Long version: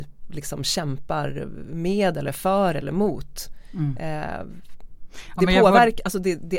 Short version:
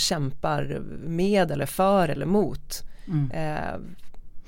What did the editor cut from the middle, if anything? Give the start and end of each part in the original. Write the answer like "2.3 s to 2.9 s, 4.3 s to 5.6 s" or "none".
none